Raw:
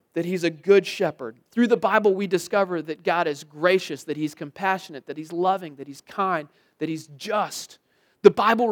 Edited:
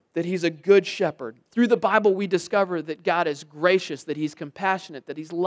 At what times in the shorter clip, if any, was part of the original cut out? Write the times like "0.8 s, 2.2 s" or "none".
none